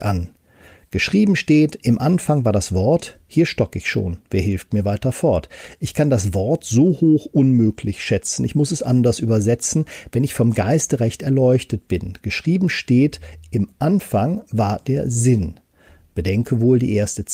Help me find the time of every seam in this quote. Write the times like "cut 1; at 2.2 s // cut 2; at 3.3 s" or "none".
none